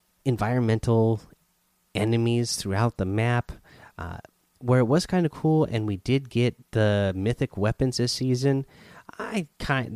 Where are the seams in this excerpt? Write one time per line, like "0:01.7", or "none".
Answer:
none